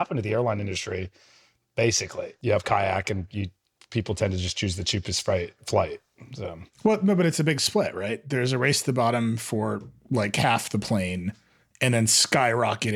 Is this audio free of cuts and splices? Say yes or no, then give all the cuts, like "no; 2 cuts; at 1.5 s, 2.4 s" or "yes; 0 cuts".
yes; 0 cuts